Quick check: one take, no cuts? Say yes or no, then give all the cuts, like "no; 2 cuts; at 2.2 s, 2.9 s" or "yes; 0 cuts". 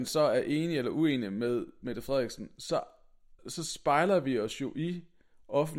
no; 1 cut; at 3.4 s